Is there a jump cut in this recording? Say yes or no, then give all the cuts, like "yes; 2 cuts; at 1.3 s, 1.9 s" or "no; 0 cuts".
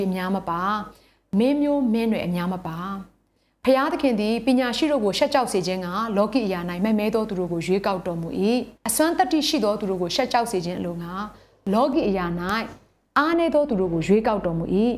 yes; 1 cut; at 8.8 s